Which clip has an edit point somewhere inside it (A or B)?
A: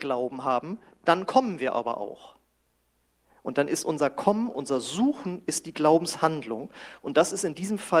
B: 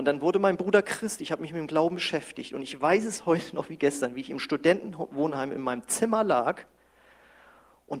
A